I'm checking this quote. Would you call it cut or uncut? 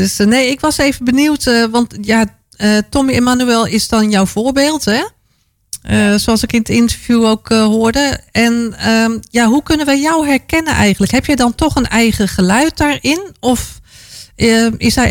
uncut